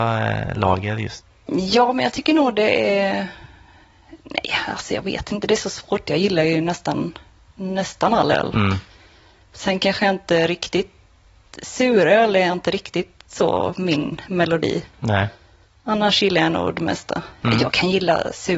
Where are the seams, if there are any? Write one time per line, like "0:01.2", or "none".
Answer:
none